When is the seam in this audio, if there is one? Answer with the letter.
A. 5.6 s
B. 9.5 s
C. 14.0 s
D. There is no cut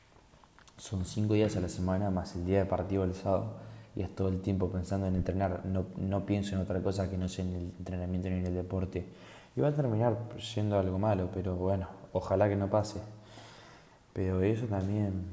D